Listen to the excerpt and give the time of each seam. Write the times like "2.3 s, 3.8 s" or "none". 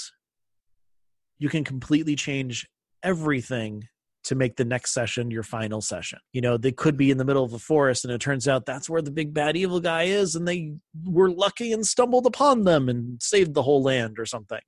6.3 s